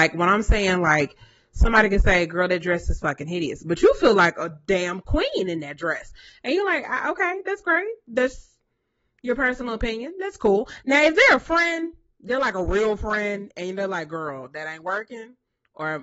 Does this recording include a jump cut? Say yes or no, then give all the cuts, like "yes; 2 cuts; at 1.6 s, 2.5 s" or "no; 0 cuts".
no; 0 cuts